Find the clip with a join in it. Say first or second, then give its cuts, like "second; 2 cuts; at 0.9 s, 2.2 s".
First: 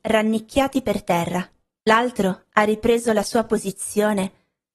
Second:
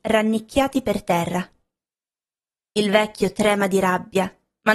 first; 1 cut; at 1.8 s